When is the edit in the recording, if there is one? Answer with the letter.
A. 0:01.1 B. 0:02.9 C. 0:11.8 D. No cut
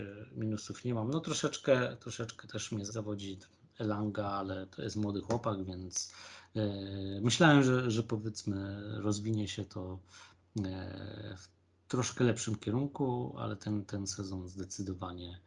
B